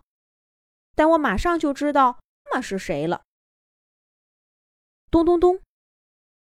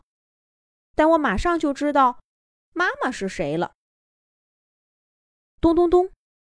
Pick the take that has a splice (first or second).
first